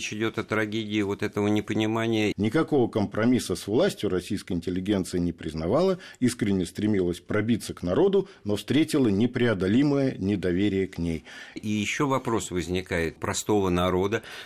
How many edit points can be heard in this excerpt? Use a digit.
3